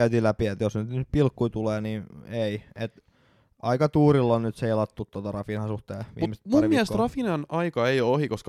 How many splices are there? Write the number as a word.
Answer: zero